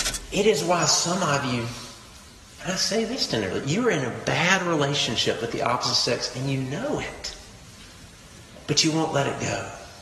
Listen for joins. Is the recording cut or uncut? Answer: uncut